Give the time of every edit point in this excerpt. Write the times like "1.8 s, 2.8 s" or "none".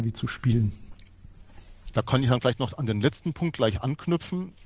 1.9 s